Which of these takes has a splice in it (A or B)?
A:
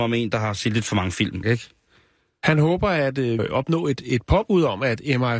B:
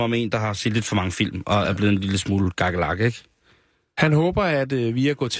A